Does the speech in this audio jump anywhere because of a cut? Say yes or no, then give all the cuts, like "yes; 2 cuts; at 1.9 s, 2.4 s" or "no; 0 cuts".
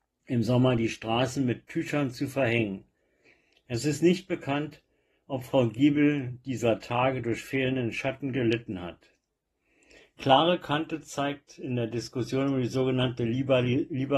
no; 0 cuts